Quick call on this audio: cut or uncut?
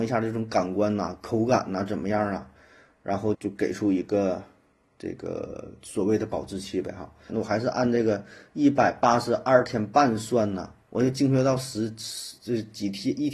cut